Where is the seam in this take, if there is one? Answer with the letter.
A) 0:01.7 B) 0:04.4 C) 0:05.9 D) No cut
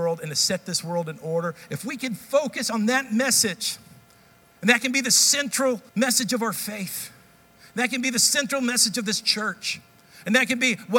C